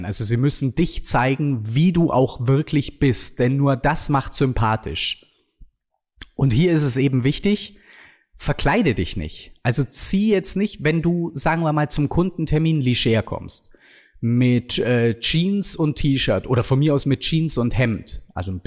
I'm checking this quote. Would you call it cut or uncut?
uncut